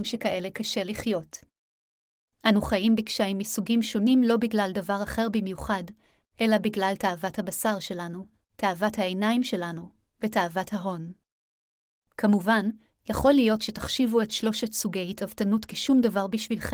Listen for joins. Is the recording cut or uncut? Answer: uncut